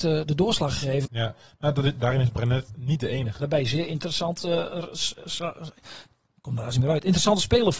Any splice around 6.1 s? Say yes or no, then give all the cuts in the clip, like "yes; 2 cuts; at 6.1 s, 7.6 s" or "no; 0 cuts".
no; 2 cuts; at 1.1 s, 3.4 s